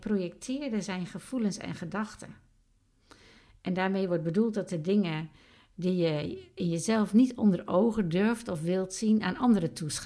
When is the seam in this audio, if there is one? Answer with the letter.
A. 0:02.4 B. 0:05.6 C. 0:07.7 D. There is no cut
D